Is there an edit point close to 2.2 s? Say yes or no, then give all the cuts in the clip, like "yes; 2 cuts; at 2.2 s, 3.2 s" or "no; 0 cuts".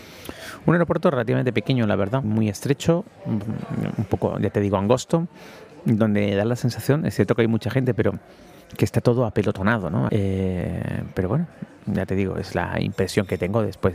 yes; 2 cuts; at 2.2 s, 10.1 s